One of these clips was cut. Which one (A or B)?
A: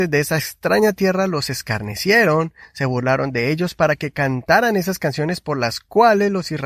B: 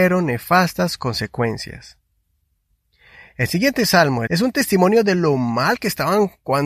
B